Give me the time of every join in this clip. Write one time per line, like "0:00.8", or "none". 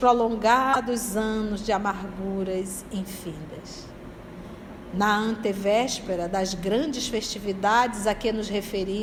none